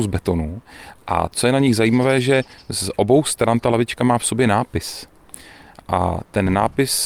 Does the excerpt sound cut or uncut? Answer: uncut